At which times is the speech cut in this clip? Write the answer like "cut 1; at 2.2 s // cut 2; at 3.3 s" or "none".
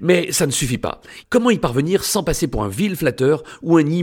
cut 1; at 1.2 s